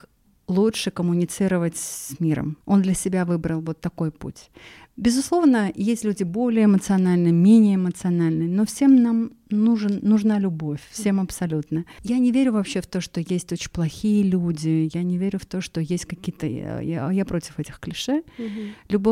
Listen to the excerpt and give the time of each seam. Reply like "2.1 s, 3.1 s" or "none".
none